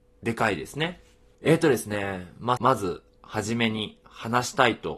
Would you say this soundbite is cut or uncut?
cut